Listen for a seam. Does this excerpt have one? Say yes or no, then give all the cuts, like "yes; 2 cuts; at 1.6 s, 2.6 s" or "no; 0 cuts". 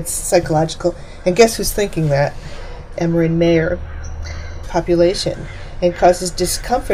yes; 2 cuts; at 3.0 s, 4.6 s